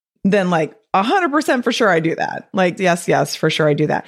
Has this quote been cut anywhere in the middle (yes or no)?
yes